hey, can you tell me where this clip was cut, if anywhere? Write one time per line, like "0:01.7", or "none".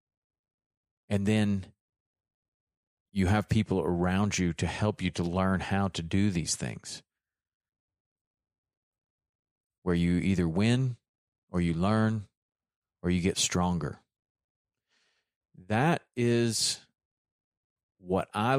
none